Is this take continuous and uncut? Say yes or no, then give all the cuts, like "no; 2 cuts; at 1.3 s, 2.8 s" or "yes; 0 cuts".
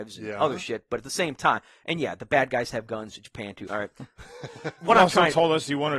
no; 1 cut; at 3.7 s